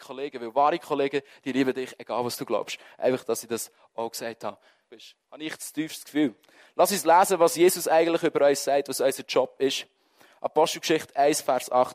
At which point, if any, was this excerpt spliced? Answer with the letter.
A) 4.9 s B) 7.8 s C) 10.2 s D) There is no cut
A